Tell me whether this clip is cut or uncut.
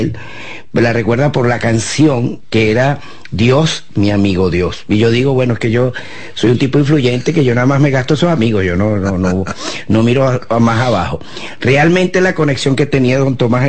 uncut